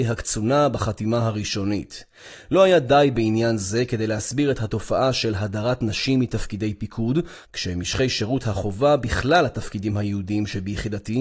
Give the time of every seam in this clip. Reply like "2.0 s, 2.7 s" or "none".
7.5 s